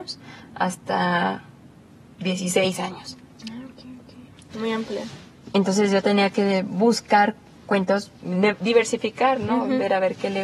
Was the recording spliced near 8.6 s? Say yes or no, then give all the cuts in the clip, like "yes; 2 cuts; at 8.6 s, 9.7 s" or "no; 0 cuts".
no; 1 cut; at 4.5 s